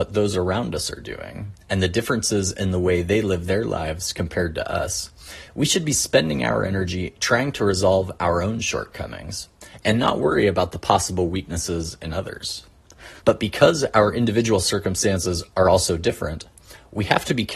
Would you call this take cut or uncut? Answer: cut